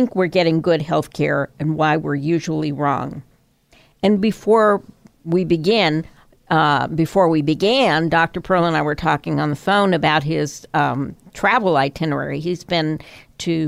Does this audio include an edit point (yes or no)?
no